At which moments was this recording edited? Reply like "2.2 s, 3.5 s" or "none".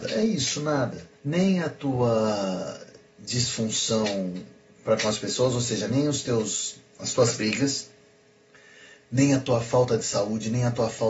1.1 s